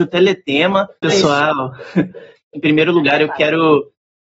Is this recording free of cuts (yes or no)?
no